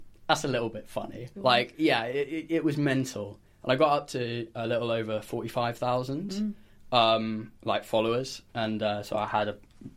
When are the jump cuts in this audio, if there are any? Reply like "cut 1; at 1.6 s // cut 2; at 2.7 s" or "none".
cut 1; at 1.3 s // cut 2; at 3.6 s